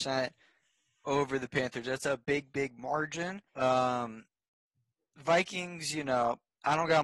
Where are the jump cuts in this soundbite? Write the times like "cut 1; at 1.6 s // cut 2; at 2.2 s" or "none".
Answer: cut 1; at 3.5 s